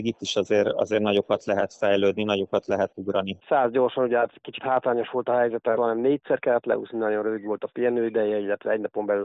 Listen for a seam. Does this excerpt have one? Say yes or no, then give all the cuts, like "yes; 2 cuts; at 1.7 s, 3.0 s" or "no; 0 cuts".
yes; 2 cuts; at 3.4 s, 5.8 s